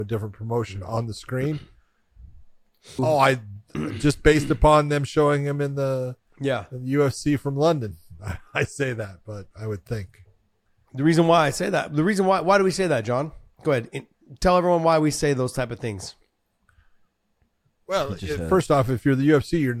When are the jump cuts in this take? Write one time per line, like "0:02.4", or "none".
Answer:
0:03.0
0:09.5